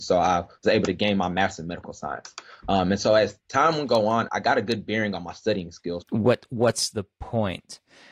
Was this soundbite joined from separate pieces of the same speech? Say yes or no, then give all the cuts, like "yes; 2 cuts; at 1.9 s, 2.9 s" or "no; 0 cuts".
yes; 2 cuts; at 4.3 s, 6.0 s